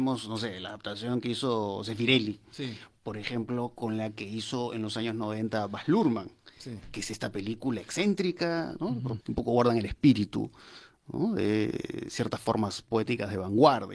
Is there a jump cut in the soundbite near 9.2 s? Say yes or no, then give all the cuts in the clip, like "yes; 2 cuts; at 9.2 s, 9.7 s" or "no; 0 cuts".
yes; 1 cut; at 9.2 s